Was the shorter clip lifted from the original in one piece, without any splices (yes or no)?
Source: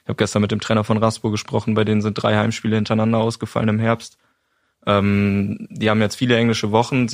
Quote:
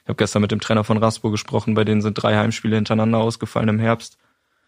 yes